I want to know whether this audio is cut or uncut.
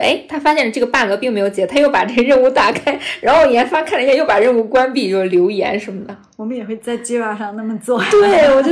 uncut